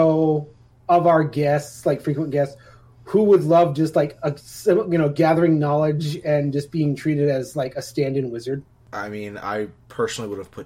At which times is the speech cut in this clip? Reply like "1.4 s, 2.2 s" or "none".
none